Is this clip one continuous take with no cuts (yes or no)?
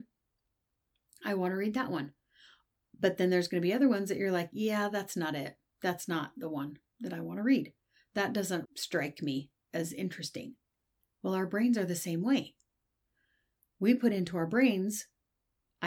no